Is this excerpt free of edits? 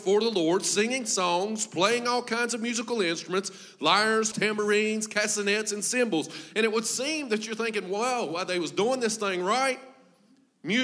no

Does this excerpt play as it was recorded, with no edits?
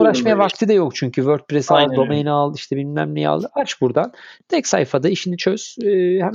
yes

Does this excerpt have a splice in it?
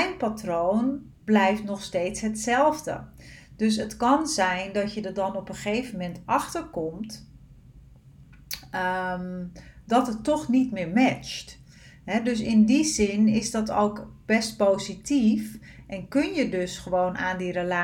no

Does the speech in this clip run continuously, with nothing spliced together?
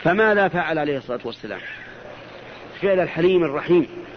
no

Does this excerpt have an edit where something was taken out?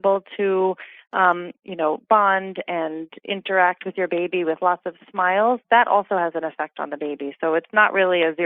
no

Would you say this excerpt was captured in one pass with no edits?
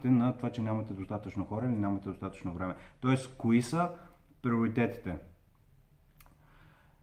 yes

